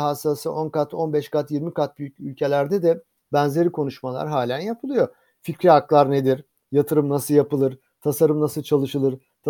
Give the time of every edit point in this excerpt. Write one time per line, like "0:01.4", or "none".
none